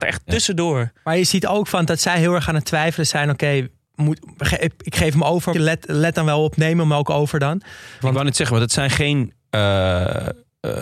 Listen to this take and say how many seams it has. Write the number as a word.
two